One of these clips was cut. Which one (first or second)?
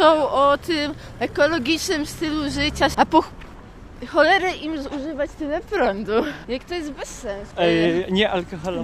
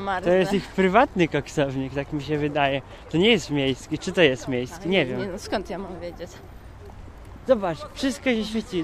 first